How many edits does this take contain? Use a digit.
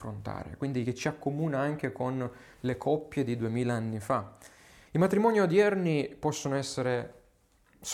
1